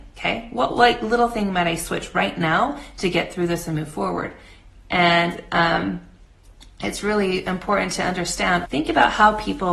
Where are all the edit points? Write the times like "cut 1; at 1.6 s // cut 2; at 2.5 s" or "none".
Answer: cut 1; at 8.7 s